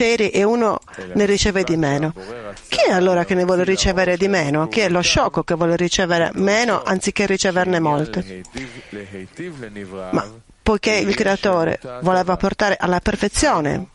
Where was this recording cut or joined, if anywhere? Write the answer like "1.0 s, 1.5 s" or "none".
none